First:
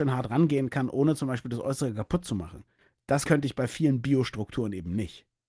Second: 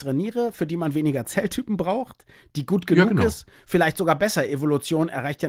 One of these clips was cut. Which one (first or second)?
first